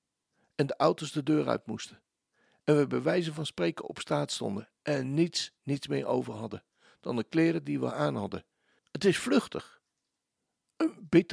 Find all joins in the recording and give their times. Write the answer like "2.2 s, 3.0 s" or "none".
5.6 s, 8.8 s